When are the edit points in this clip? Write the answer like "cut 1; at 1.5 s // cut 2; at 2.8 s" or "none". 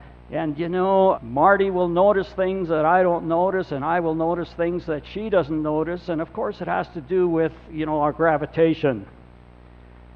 cut 1; at 1.1 s // cut 2; at 7.7 s